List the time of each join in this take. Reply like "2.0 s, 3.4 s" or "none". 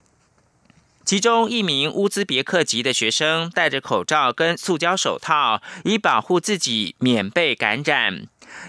1.0 s